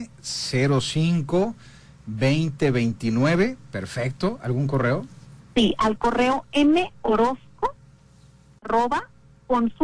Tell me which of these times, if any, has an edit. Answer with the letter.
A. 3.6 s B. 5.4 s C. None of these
C